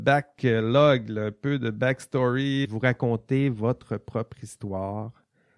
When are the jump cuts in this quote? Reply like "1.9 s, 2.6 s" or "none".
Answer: 2.7 s